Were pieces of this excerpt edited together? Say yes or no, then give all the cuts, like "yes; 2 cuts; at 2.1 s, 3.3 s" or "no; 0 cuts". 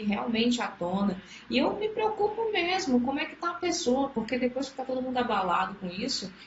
no; 0 cuts